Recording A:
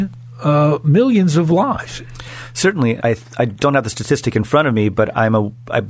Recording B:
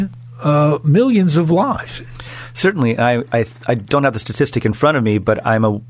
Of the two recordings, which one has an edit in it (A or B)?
A